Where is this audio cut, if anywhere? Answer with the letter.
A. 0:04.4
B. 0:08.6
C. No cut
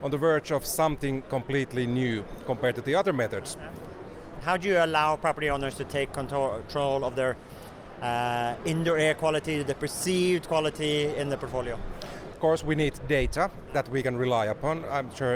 A